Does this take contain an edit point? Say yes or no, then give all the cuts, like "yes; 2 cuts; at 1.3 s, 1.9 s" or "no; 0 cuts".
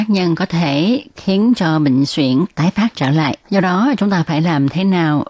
yes; 1 cut; at 3.4 s